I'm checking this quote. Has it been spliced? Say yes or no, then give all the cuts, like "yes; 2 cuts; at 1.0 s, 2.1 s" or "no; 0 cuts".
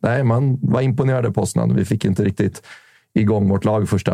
no; 0 cuts